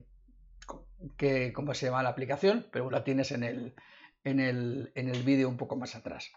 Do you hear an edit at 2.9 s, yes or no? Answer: yes